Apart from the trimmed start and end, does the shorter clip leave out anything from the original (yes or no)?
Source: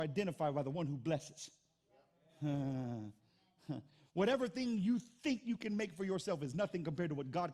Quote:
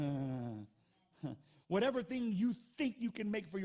no